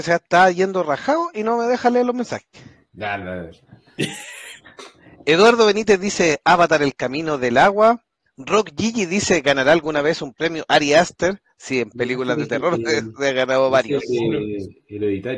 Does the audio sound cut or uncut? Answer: uncut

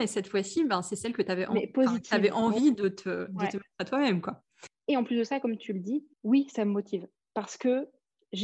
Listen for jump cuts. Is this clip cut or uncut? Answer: cut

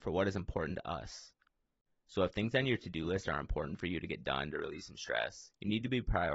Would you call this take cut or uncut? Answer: uncut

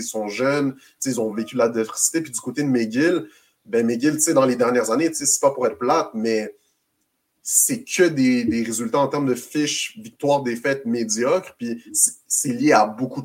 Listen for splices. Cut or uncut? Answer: uncut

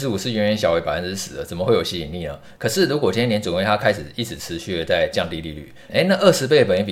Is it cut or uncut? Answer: cut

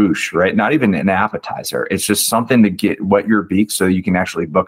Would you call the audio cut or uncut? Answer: uncut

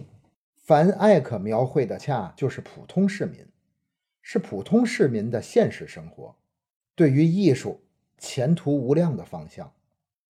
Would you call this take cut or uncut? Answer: cut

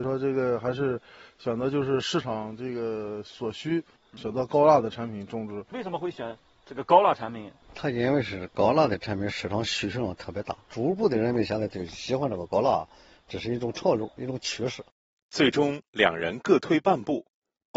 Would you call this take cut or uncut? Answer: uncut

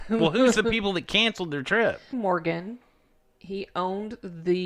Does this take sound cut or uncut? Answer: cut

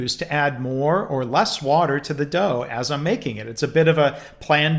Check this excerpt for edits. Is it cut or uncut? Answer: uncut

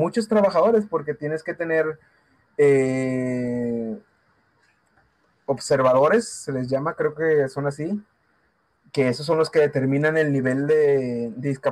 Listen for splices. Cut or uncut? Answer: uncut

